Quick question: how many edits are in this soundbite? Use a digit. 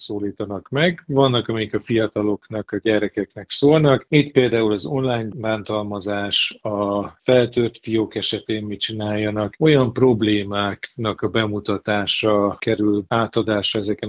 0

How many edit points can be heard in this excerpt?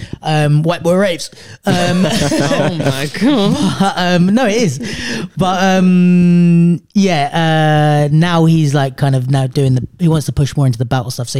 0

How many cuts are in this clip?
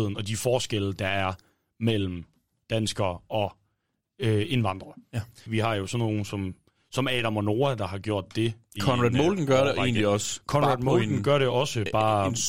1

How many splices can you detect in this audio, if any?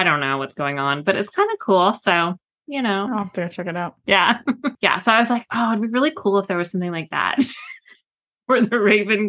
1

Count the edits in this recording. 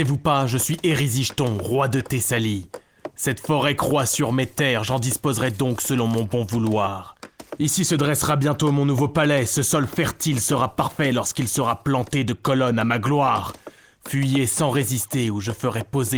0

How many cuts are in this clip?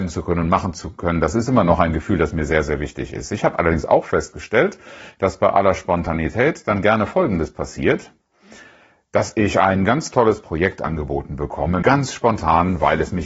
1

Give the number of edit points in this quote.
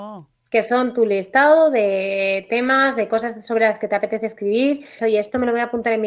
1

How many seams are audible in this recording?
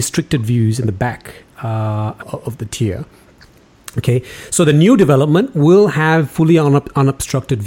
1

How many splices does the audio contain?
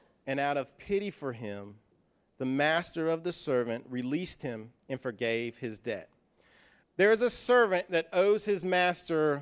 1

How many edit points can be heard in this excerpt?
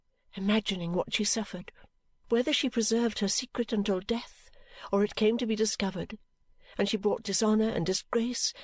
1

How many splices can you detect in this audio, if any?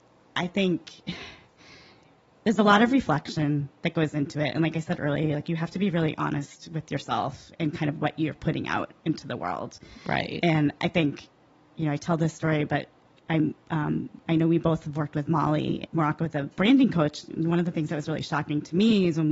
0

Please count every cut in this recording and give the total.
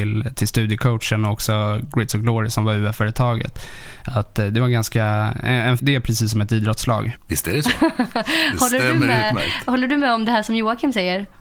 2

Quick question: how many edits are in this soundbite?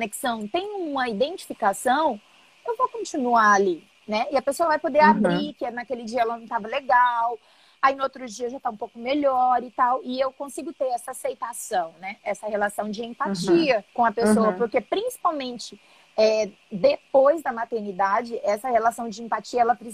1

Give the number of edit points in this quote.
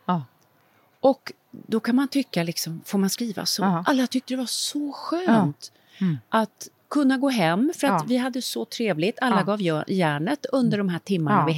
0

